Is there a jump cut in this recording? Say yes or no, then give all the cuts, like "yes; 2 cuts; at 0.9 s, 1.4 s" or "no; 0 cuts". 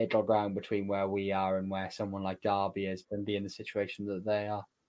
yes; 1 cut; at 3.0 s